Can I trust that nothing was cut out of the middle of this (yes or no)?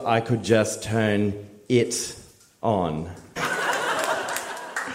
no